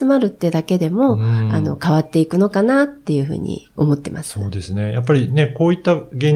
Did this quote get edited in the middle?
no; 0 cuts

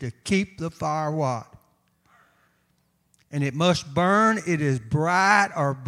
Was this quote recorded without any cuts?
yes; 0 cuts

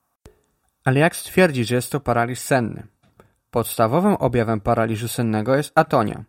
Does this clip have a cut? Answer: no; 0 cuts

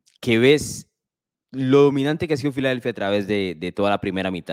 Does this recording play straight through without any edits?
yes; 0 cuts

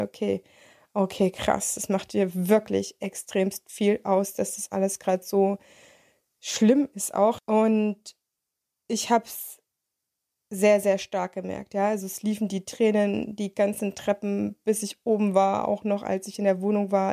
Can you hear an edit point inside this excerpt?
yes; 1 cut; at 7.4 s

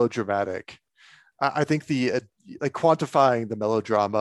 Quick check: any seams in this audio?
no; 0 cuts

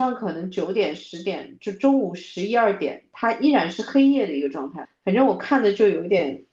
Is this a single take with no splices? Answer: no; 1 cut; at 4.8 s

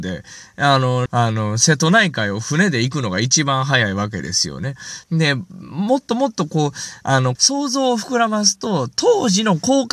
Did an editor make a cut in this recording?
yes; 3 cuts; at 1.1 s, 5.0 s, 7.4 s

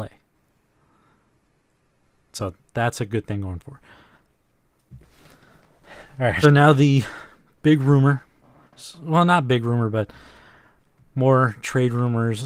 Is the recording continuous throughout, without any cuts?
no; 1 cut; at 6.4 s

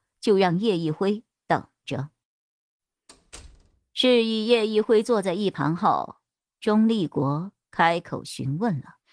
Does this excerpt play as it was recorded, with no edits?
yes; 0 cuts

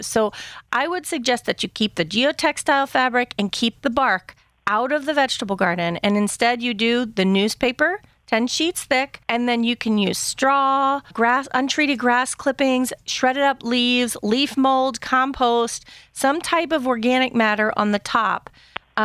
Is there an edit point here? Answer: yes; 2 cuts; at 9.2 s, 11.1 s

